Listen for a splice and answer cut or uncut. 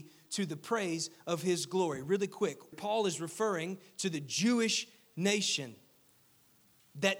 cut